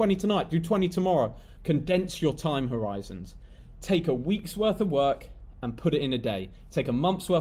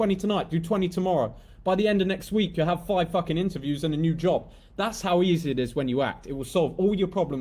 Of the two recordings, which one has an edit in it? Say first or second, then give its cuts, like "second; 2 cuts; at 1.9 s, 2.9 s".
first; 1 cut; at 1.6 s